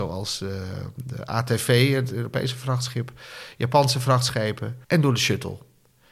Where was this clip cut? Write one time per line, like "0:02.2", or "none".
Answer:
0:04.8